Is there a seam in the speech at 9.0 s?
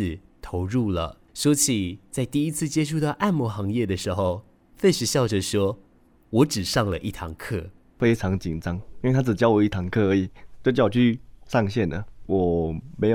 no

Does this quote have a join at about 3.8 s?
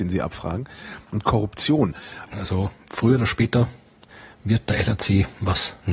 no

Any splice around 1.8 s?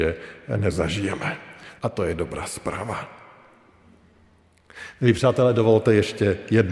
yes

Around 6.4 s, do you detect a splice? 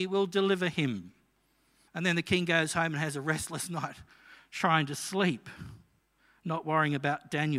no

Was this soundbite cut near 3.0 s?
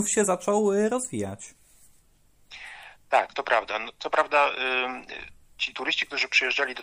no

